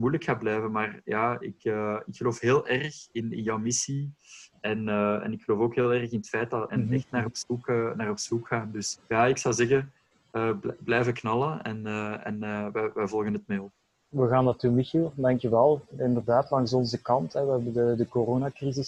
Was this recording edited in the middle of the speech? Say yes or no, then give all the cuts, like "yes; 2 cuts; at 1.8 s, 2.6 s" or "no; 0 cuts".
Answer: yes; 2 cuts; at 6.7 s, 8.9 s